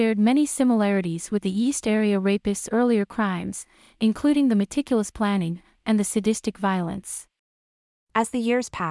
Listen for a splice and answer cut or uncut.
cut